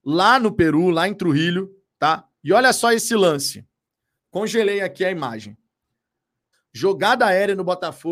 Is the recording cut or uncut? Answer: cut